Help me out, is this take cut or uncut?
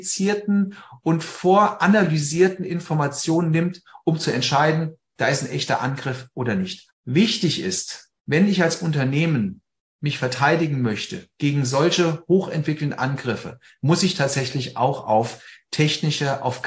cut